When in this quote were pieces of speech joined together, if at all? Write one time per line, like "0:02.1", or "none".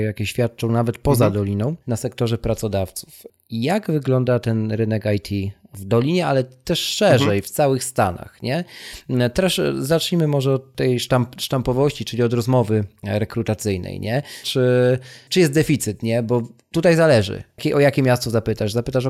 0:01.8
0:14.4